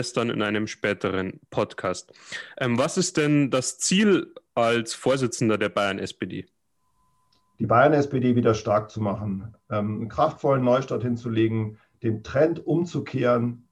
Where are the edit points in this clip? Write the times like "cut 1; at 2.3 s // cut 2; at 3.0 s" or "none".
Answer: none